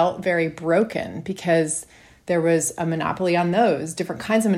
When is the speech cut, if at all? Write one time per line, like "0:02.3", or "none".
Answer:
none